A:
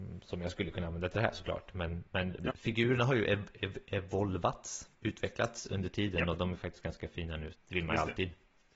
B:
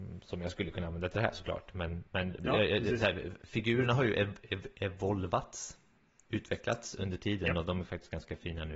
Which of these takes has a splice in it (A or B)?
A